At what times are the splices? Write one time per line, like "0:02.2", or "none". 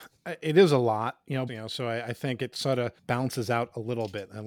0:01.5
0:03.0